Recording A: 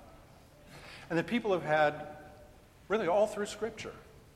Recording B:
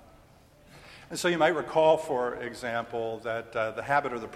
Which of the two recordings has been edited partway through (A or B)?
B